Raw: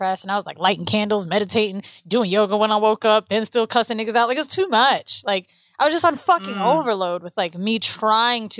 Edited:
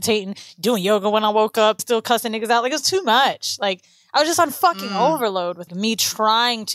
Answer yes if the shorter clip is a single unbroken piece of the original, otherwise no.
no